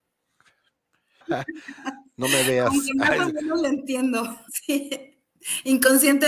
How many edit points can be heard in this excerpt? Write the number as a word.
two